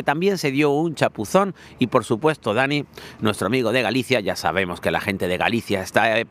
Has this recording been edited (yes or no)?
no